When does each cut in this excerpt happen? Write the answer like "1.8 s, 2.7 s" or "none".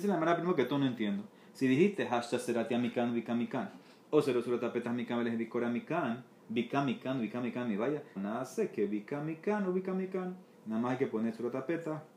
8.2 s, 10.5 s